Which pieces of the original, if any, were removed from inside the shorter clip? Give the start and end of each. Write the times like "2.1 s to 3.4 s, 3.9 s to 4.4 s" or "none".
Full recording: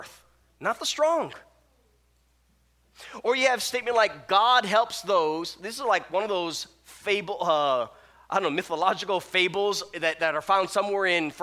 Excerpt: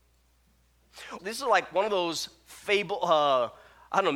3.2 s to 5.6 s